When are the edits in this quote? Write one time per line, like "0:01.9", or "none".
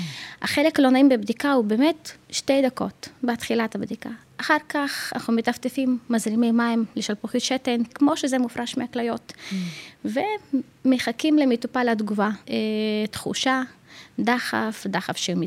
0:07.9
0:12.4